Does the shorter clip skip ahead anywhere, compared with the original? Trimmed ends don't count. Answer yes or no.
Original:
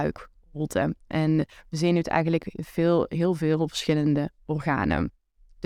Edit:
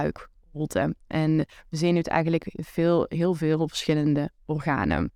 no